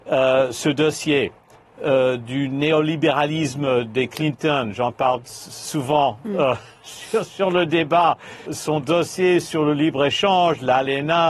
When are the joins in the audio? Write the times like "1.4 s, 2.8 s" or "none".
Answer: 1.6 s, 8.5 s